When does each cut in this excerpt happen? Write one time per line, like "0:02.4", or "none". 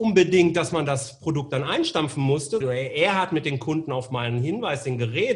0:02.6